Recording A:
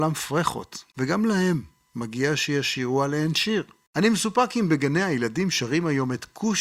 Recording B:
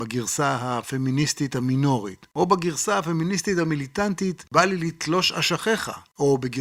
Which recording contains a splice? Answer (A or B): A